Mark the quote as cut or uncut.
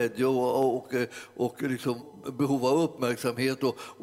cut